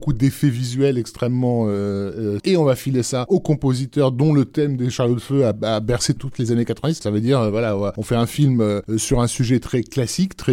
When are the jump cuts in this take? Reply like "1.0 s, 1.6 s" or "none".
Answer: 2.4 s, 7.0 s